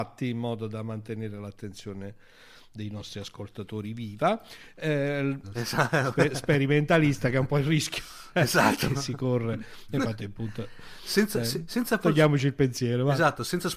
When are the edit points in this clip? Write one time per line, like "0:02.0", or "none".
0:05.4